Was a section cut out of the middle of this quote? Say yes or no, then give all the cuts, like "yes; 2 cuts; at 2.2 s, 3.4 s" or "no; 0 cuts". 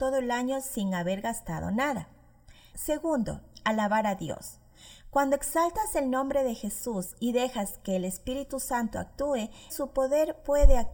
yes; 2 cuts; at 2.7 s, 9.7 s